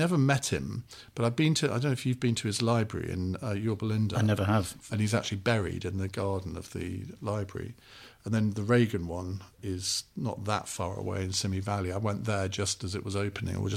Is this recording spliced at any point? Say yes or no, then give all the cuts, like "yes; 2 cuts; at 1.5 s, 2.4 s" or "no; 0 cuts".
yes; 1 cut; at 4.9 s